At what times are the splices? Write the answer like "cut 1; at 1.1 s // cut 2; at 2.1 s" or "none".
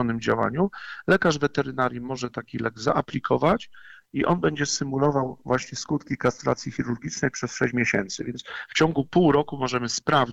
none